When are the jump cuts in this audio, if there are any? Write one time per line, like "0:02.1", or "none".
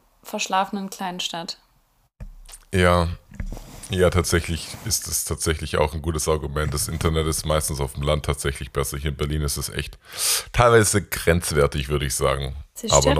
none